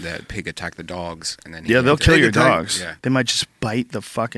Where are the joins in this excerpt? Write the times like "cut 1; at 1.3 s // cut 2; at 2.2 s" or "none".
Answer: cut 1; at 3.0 s